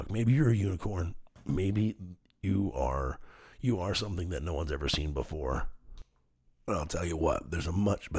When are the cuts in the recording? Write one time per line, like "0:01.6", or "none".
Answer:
none